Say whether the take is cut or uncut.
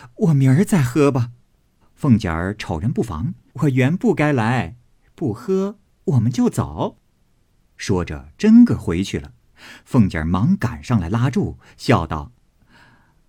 cut